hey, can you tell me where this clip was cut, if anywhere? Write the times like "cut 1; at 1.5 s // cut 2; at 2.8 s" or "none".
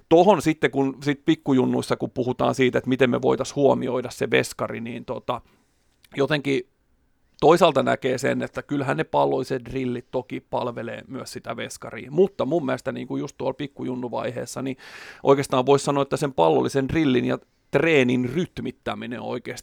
none